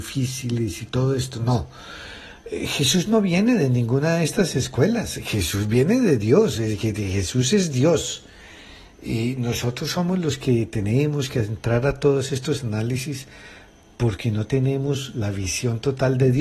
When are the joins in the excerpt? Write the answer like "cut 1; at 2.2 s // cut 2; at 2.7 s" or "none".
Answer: none